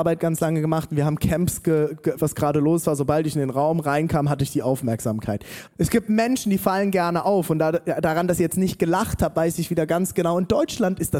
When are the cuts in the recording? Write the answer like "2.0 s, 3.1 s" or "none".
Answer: 2.2 s, 5.7 s